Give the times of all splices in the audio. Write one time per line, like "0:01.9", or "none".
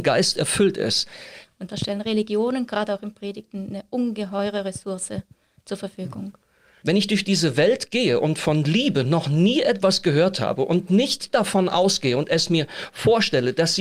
0:01.4
0:06.8